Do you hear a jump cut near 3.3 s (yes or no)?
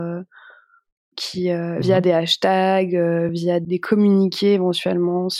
yes